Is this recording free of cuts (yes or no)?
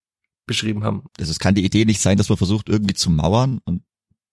no